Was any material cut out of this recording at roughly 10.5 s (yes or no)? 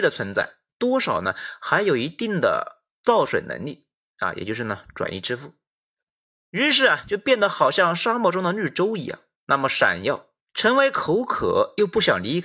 yes